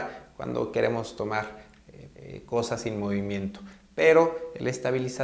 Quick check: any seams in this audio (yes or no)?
yes